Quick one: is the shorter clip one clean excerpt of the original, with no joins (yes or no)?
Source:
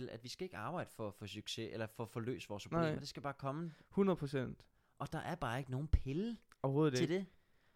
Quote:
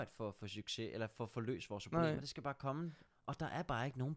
no